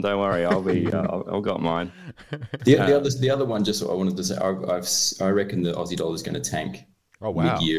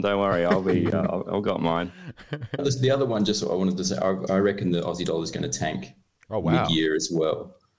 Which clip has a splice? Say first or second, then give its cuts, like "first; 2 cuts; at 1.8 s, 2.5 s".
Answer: second; 2 cuts; at 2.6 s, 4.3 s